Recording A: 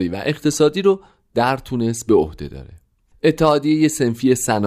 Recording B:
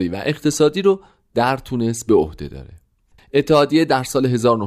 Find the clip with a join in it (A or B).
B